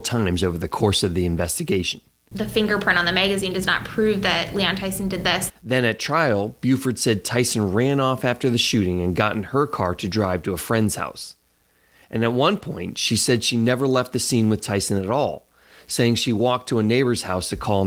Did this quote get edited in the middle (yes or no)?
yes